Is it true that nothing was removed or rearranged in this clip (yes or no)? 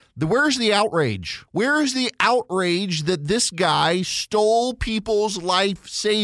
no